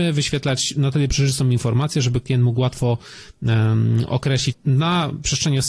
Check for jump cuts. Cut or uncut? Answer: cut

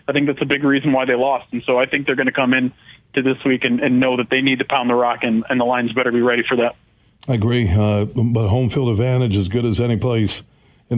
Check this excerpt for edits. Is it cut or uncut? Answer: uncut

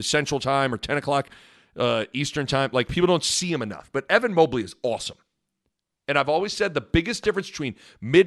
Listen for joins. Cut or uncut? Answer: uncut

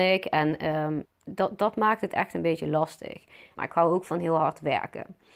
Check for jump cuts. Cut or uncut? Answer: cut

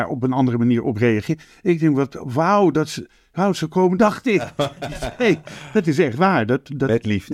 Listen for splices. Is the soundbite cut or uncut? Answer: cut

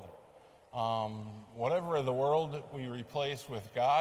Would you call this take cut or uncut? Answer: uncut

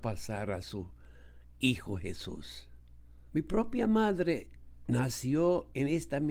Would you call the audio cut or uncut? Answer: cut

